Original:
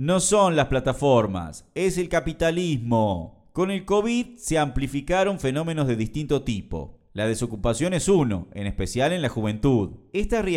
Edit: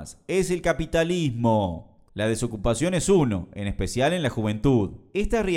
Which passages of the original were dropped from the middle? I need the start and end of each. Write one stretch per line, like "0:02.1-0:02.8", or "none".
0:03.5-0:07.0